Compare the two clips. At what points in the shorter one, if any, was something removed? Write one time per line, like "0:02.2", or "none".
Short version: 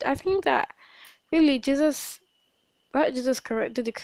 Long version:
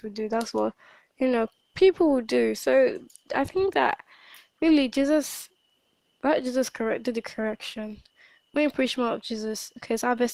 none